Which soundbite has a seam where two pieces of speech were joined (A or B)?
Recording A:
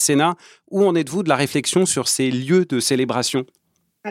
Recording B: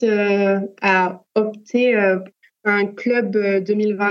B